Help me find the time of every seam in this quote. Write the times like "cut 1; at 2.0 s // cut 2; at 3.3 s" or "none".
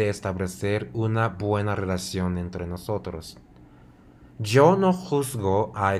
none